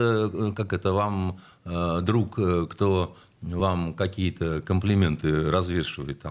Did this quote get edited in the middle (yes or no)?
no